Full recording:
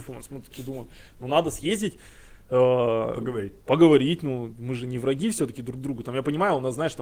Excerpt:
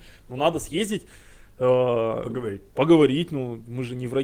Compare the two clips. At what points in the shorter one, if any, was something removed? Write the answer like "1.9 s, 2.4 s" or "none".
none